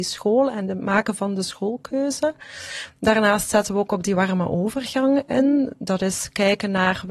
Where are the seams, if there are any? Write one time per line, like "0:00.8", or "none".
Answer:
none